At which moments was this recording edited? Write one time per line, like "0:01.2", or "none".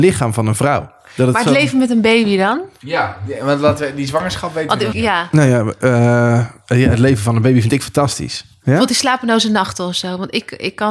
0:04.9
0:08.6